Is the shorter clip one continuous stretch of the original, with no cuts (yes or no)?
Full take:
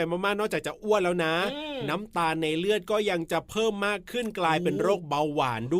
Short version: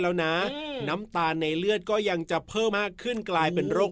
no